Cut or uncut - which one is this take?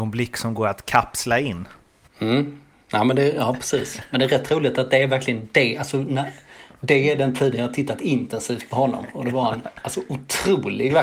cut